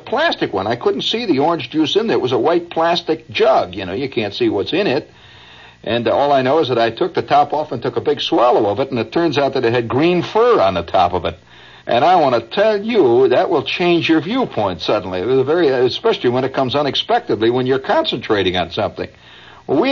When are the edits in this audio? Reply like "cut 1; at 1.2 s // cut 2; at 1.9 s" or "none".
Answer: cut 1; at 11.8 s

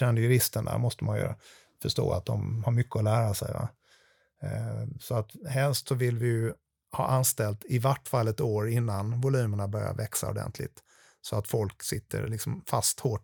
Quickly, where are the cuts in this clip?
none

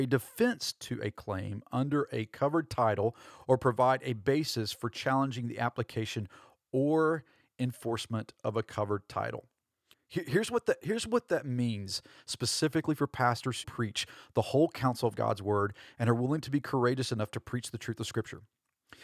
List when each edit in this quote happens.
cut 1; at 9.9 s // cut 2; at 13.6 s

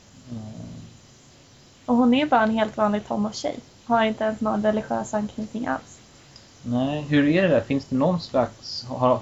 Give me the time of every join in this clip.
none

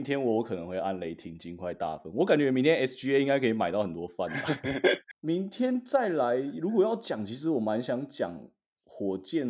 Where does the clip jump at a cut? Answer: cut 1; at 5.1 s

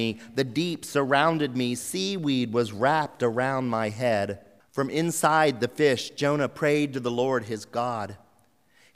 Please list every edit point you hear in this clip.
cut 1; at 4.6 s

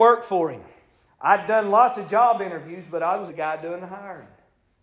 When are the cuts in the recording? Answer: cut 1; at 1.1 s // cut 2; at 3.3 s

